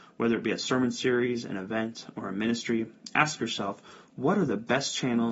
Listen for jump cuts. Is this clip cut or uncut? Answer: uncut